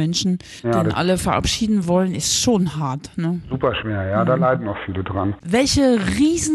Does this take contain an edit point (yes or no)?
no